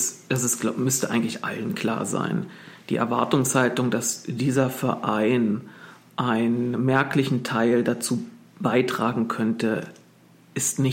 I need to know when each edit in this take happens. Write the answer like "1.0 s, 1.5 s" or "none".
none